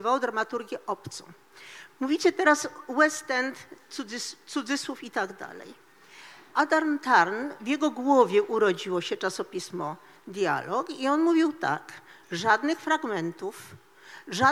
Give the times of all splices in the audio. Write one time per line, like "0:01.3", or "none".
0:06.5
0:12.2